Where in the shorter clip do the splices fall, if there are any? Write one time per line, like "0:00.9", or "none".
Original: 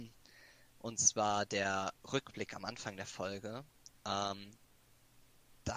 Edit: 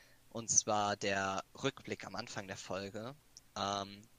none